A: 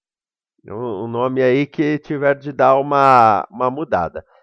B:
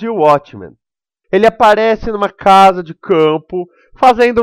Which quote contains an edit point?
B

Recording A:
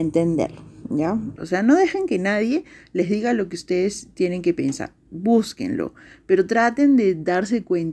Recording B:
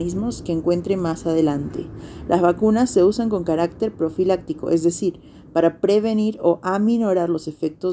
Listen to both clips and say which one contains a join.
A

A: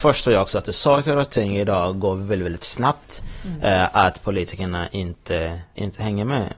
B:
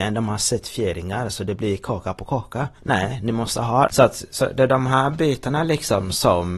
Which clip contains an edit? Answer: B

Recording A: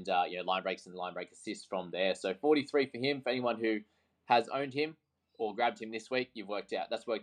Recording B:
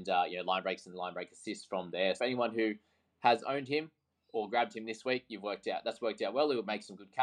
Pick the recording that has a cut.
B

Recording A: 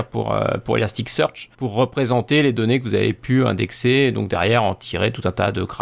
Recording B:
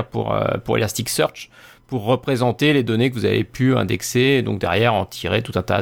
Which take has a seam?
A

